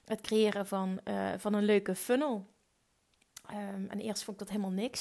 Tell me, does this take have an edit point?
no; 0 cuts

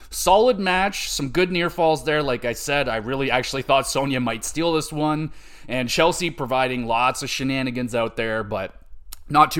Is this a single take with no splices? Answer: yes; 0 cuts

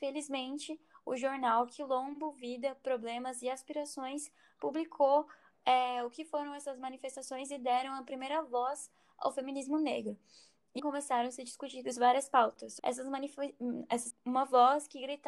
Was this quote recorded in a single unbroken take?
no; 3 cuts; at 10.8 s, 12.8 s, 14.1 s

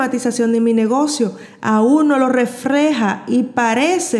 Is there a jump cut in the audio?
no; 0 cuts

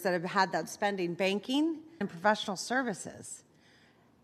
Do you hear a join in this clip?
yes; 1 cut; at 2.0 s

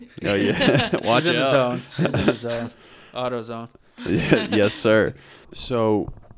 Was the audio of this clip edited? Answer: yes; 1 cut; at 5.4 s

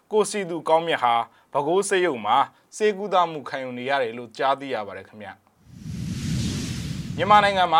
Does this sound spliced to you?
no; 0 cuts

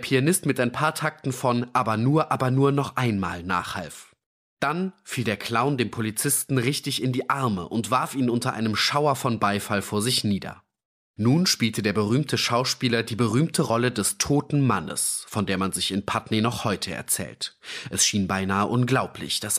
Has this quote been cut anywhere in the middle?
no; 0 cuts

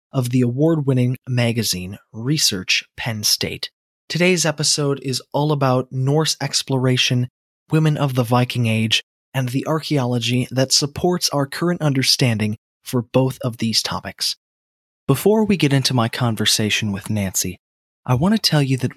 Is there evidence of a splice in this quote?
no; 0 cuts

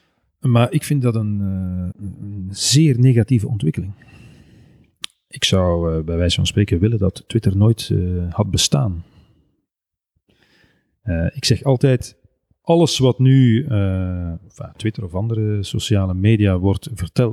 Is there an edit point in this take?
yes; 1 cut; at 1.9 s

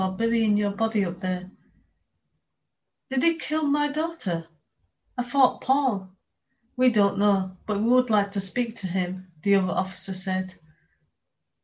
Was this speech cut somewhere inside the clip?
no; 0 cuts

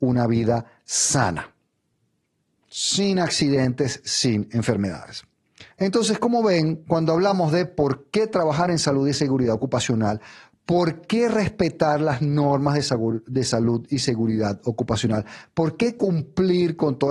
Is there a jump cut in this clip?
yes; 1 cut; at 5.7 s

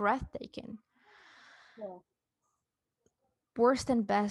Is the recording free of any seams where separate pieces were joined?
yes; 0 cuts

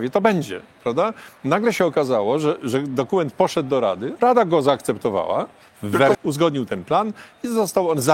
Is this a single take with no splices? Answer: no; 1 cut; at 6.1 s

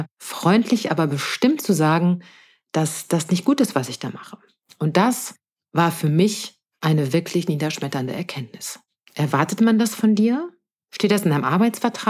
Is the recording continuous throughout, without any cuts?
no; 2 cuts; at 4.7 s, 9.1 s

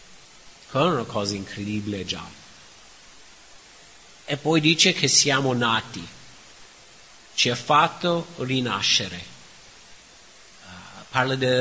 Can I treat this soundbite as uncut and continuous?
yes; 0 cuts

